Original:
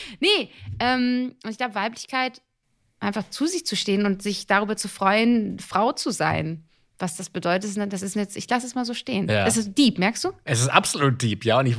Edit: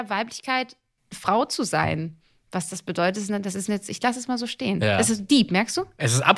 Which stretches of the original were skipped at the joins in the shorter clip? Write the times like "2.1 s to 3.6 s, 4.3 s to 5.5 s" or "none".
2.8 s to 5.6 s